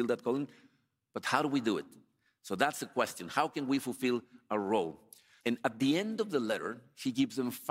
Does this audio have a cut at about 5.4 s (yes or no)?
yes